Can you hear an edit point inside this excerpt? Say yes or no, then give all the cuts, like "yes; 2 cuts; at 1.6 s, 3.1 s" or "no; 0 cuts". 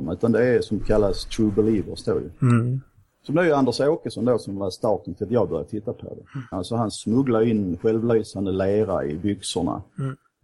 yes; 1 cut; at 6.5 s